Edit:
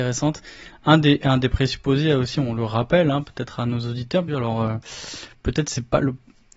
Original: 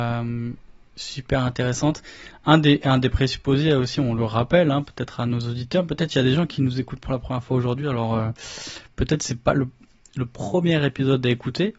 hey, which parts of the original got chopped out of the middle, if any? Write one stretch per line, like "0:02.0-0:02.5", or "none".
0:05.9-0:07.8